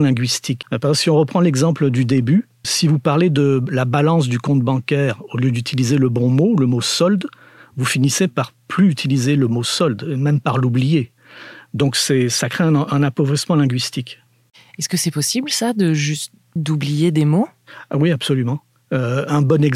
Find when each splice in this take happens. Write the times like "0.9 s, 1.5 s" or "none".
2.6 s, 16.6 s